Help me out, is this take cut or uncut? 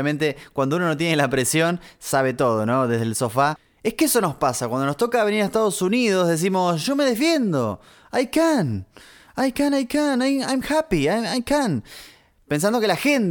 uncut